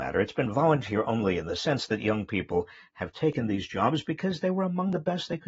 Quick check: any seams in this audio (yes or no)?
no